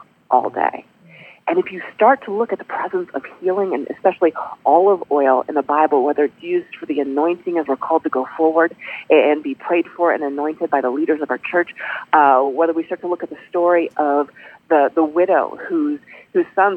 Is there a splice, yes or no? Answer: no